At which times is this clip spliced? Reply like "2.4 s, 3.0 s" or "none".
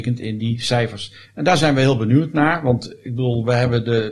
none